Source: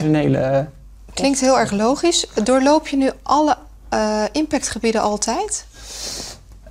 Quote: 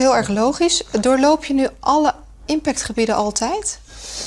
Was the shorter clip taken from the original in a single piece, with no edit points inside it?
no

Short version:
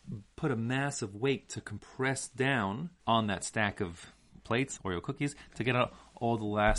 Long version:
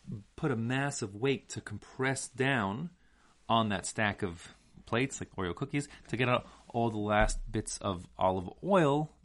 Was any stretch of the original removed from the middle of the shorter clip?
yes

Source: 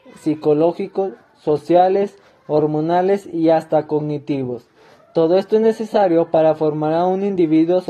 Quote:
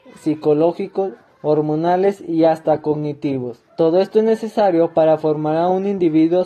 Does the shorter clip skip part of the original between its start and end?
yes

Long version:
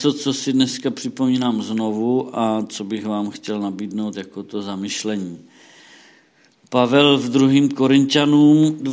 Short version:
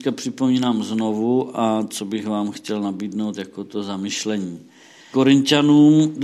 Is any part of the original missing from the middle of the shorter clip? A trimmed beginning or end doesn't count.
yes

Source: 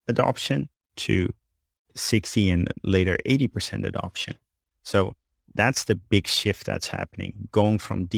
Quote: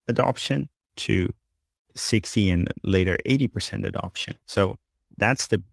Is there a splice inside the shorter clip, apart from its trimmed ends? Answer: yes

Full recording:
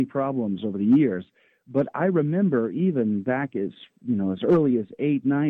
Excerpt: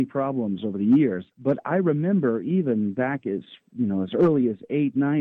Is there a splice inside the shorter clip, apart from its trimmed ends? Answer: yes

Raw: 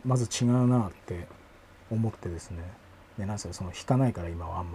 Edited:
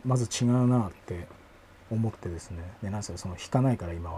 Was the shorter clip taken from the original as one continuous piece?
no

